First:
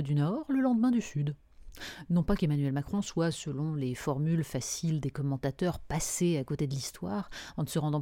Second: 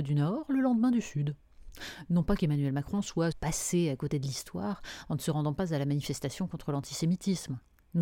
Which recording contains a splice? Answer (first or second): second